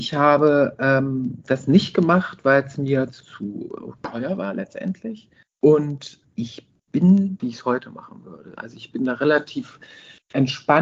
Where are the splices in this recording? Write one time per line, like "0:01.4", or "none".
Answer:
0:07.4

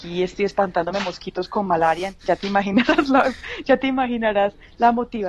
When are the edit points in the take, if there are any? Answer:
none

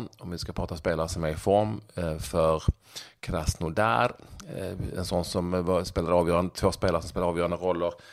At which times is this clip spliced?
none

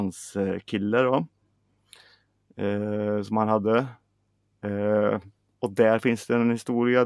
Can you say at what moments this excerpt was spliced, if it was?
none

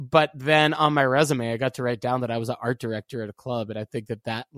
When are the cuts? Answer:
none

